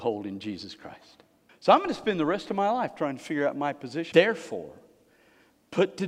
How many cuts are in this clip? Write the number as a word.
two